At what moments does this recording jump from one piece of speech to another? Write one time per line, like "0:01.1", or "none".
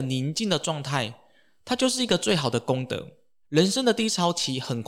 0:03.4